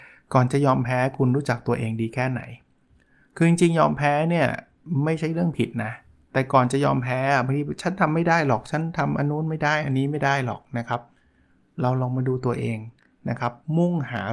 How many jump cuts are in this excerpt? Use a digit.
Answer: 0